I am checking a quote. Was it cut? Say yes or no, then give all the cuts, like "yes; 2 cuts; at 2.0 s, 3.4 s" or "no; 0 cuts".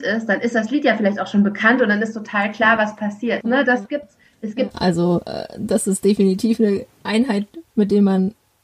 yes; 2 cuts; at 3.4 s, 4.7 s